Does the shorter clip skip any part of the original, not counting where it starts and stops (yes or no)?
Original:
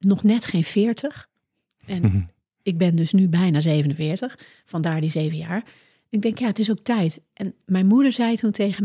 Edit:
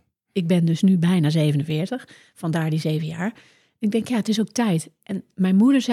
no